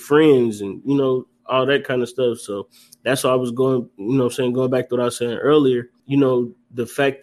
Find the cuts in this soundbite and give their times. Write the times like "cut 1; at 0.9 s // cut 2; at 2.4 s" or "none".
cut 1; at 6.0 s